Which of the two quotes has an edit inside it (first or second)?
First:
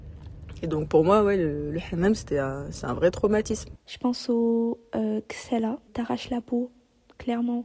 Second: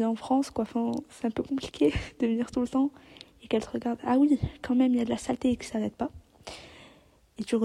first